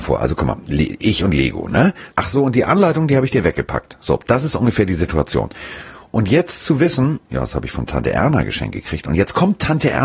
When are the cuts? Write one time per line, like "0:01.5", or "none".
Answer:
0:02.1